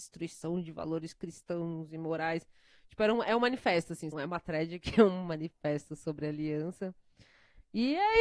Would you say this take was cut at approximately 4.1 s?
yes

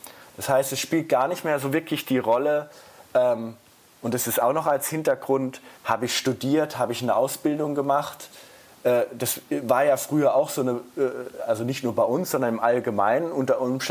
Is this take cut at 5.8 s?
yes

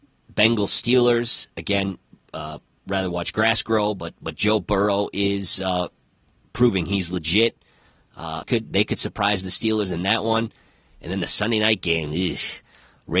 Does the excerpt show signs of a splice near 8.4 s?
yes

